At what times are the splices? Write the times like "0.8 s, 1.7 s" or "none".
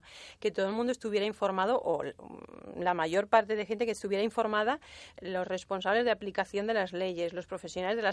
5.1 s